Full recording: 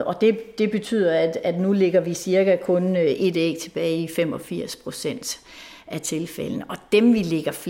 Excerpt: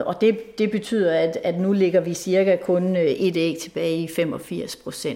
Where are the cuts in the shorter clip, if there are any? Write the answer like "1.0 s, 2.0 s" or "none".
none